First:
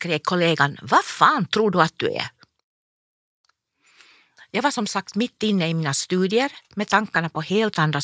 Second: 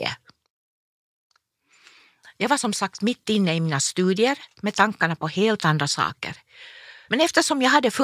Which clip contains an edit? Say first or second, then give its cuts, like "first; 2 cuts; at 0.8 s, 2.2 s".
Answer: second; 1 cut; at 7.1 s